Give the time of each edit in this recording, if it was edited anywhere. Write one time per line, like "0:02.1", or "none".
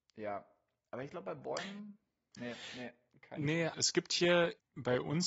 0:02.3
0:03.7

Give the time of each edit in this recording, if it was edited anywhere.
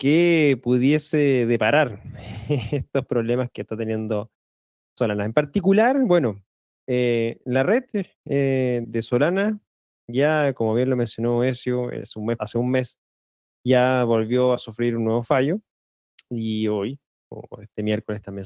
0:08.8
0:12.4

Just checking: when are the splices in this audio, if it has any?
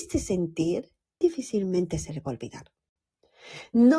0:01.2

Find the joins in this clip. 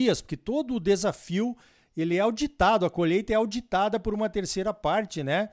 none

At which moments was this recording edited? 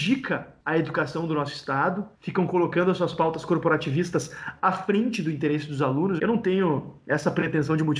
0:06.2

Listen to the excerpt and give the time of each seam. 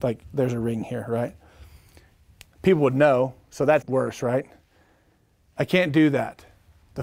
0:03.8

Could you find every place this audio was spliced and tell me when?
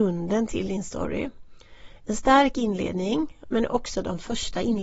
0:03.4

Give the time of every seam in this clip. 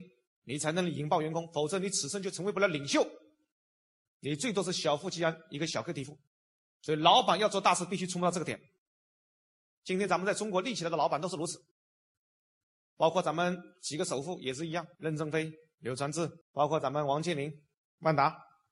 0:16.4

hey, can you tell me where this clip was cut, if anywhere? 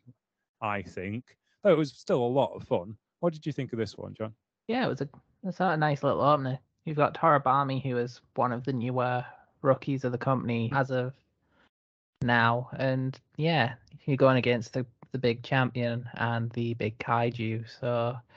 0:10.7

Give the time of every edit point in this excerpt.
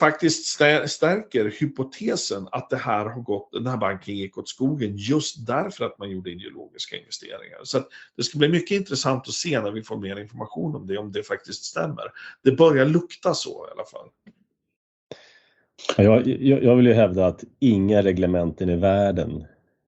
none

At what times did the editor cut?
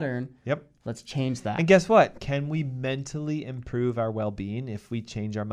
none

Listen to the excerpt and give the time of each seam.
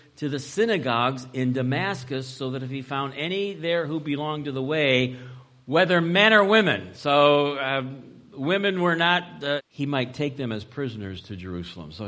0:09.6

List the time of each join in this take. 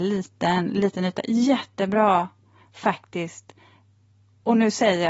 none

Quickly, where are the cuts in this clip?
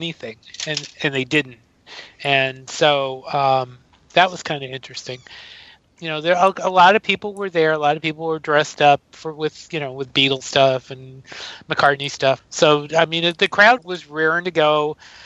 0:12.4
0:13.8

